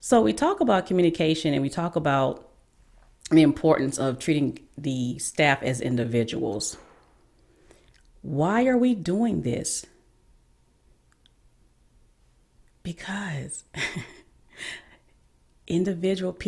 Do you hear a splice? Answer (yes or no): no